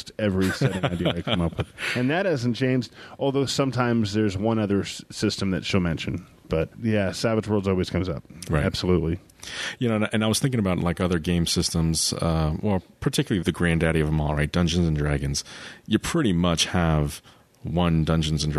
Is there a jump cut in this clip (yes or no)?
no